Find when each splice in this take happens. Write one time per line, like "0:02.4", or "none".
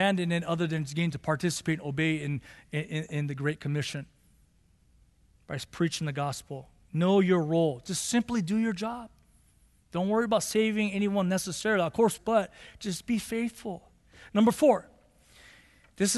0:12.2